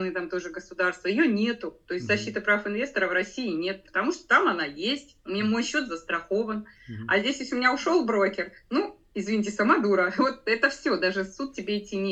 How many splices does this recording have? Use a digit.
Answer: 1